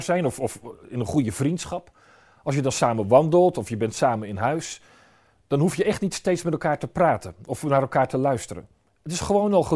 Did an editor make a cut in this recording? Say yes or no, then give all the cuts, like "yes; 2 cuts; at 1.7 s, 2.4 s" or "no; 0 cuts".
no; 0 cuts